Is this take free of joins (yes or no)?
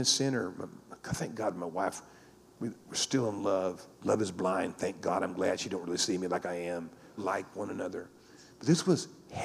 no